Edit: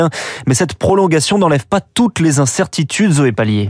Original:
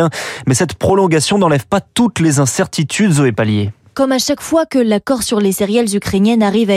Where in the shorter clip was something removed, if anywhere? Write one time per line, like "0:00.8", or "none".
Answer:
none